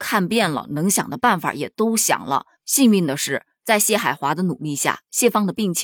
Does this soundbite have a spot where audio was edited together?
no; 0 cuts

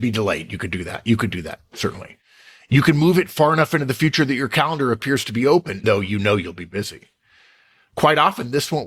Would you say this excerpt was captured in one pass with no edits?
no; 1 cut; at 5.8 s

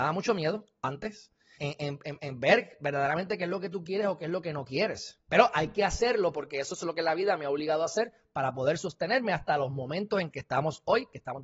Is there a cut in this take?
yes; 2 cuts; at 1.6 s, 5.3 s

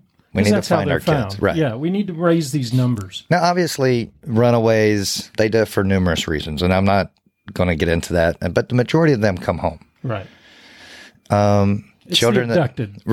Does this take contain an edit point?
yes; 1 cut; at 5.3 s

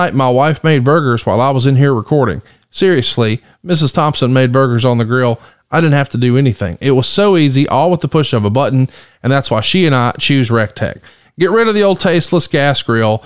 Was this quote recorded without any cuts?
yes; 0 cuts

